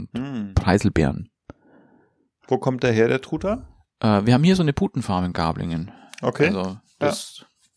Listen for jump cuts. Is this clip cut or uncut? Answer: uncut